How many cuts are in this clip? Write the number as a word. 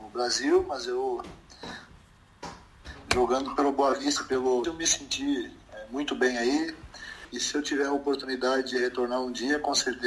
two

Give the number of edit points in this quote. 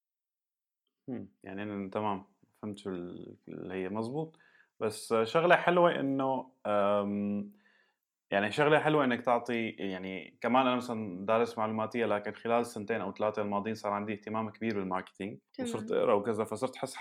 one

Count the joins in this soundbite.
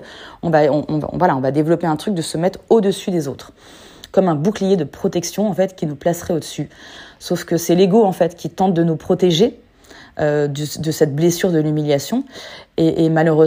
zero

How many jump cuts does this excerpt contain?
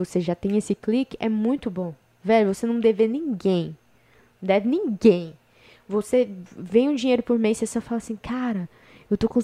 zero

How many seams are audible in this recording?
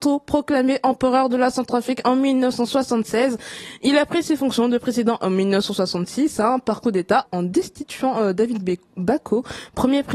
one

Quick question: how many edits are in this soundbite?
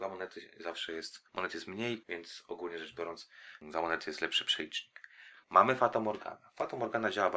two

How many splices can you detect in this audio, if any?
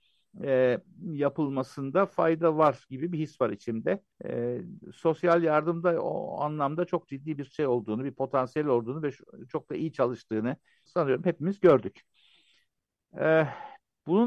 two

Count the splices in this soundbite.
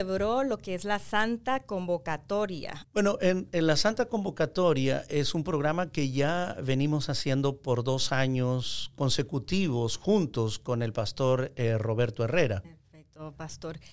two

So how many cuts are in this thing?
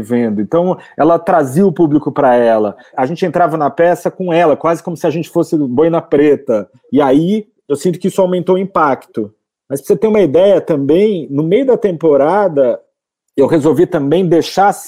zero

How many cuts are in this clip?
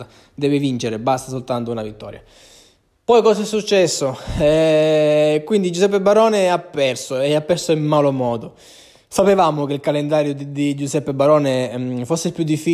zero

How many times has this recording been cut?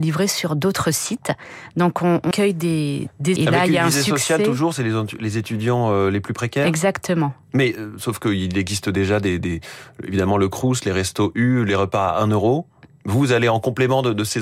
two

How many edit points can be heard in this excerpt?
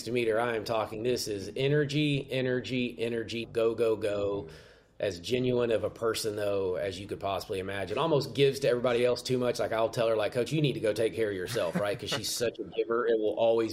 one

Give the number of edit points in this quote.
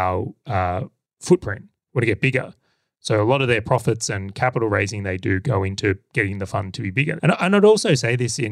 one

